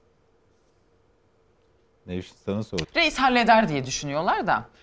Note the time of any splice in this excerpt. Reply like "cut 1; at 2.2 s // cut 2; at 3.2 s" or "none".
cut 1; at 2.8 s